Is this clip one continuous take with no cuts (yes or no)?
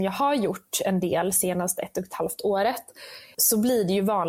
no